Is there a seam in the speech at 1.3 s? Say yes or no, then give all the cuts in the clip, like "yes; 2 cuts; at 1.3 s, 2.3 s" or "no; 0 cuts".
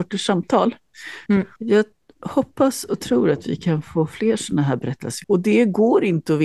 yes; 2 cuts; at 1.3 s, 5.2 s